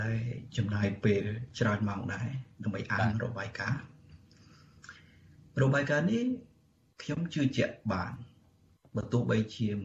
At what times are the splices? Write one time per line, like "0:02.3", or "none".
none